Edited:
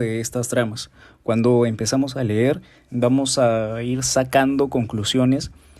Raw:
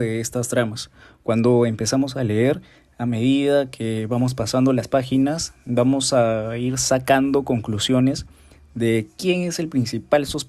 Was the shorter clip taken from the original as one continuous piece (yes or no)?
no